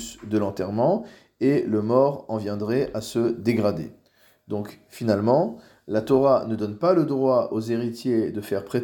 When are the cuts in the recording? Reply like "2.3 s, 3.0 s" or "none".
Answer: none